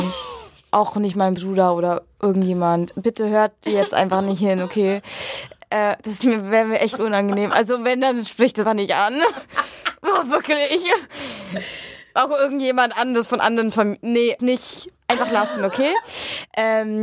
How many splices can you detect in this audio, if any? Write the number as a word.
two